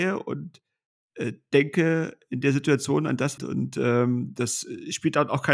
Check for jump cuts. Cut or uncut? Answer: cut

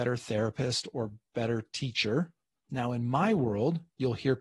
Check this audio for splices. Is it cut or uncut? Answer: cut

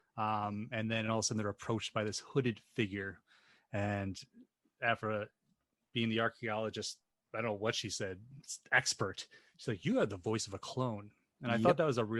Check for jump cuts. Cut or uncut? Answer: uncut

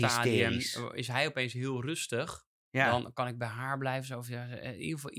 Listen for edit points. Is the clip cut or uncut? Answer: cut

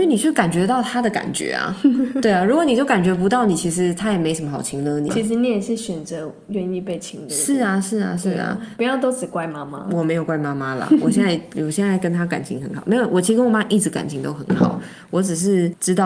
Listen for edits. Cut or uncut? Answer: cut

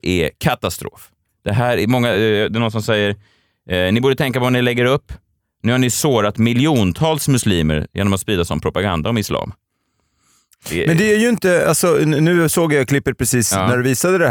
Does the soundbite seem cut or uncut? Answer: uncut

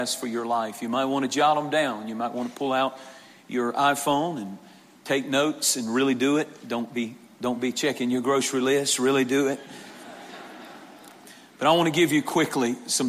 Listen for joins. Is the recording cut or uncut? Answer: uncut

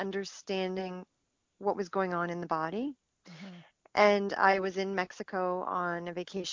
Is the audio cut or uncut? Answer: uncut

